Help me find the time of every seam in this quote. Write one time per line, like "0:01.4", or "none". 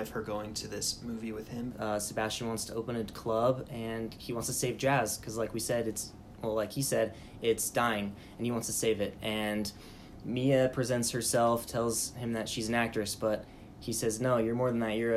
0:01.7